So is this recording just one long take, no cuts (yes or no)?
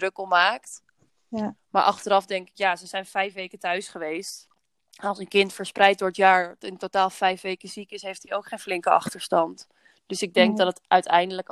yes